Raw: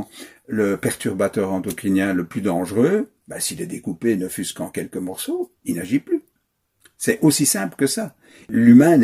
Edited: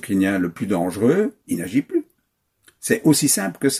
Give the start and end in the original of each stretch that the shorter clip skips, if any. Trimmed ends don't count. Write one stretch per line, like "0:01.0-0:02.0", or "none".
0:03.2-0:05.6